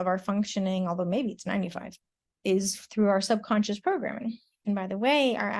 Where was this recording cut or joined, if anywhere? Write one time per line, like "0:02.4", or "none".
0:04.6